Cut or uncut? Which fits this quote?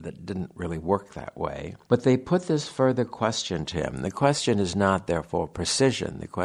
uncut